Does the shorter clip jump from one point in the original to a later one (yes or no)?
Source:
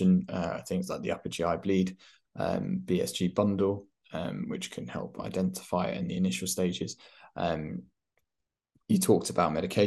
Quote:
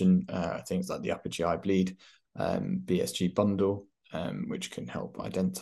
no